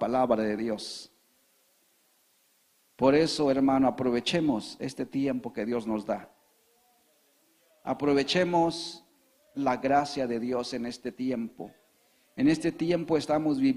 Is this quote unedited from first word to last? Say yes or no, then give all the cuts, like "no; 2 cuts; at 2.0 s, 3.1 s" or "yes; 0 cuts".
yes; 0 cuts